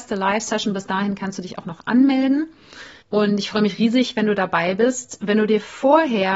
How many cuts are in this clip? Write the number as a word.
one